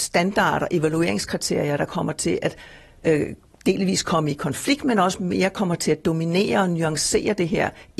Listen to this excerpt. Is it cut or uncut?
uncut